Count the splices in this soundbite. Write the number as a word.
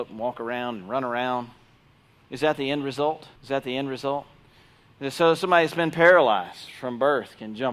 one